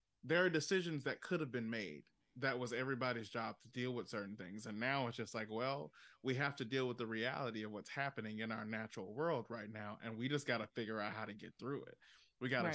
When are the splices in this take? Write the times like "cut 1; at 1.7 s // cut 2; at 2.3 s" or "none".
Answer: none